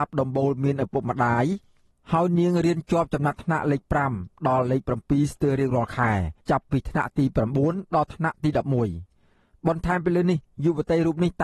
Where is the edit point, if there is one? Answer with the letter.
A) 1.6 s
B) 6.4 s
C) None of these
B